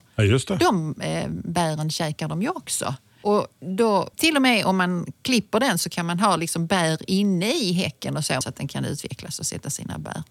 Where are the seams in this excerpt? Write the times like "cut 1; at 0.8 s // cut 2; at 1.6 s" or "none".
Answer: cut 1; at 4.1 s // cut 2; at 8.4 s